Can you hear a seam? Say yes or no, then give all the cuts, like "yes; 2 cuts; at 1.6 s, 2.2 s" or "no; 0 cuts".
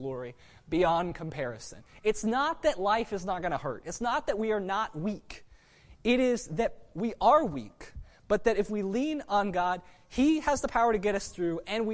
no; 0 cuts